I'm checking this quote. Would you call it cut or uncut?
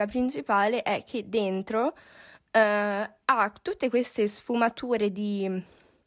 uncut